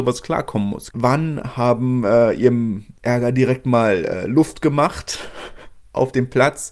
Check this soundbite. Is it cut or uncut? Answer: cut